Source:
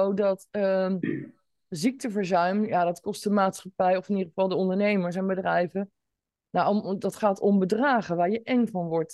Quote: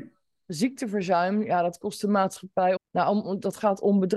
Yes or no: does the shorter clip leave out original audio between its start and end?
yes